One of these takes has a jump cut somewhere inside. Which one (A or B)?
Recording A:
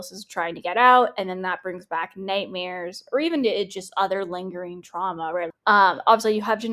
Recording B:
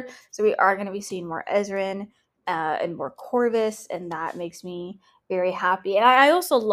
A